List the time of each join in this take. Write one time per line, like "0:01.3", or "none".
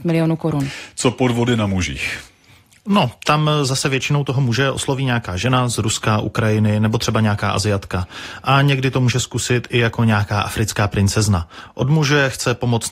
none